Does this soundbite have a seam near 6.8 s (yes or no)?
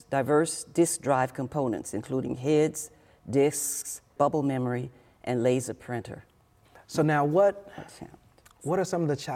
no